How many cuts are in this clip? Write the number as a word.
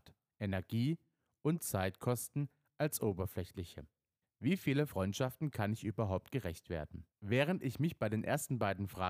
two